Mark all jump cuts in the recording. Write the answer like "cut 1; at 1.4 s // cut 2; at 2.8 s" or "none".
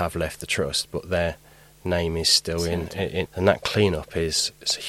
cut 1; at 3.3 s

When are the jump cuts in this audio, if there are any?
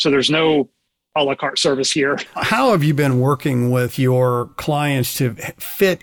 cut 1; at 2.3 s

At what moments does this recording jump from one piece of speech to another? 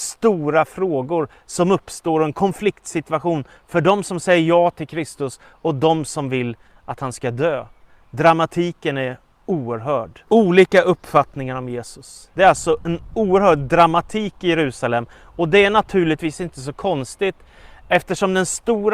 cut 1; at 10.3 s // cut 2; at 12.3 s

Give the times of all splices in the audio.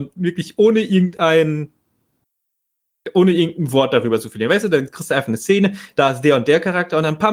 none

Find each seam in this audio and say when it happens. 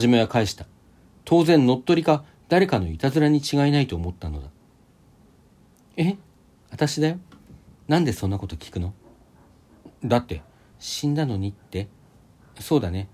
cut 1; at 10.7 s

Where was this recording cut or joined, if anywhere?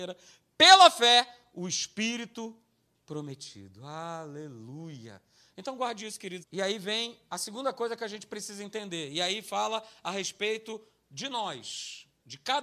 cut 1; at 6.4 s

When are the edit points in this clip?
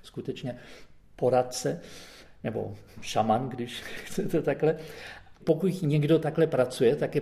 cut 1; at 5.3 s

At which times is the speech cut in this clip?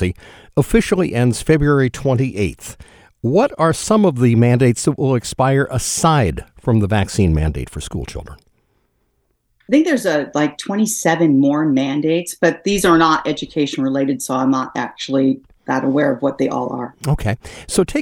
none

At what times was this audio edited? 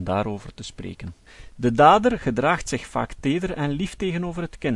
cut 1; at 1.5 s

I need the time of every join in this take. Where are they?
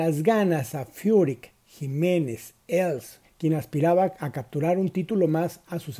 cut 1; at 3.2 s

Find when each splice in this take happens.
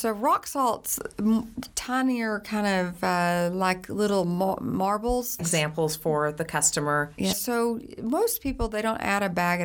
cut 1; at 5.4 s // cut 2; at 7.3 s

